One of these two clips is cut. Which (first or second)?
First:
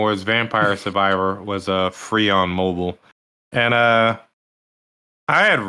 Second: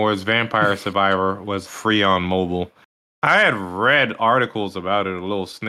second